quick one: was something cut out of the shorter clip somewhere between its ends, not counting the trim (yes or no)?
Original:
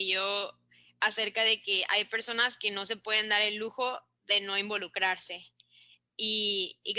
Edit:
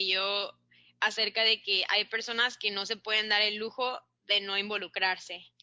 no